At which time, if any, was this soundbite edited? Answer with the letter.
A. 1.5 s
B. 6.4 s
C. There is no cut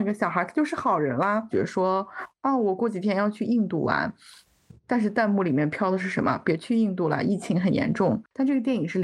A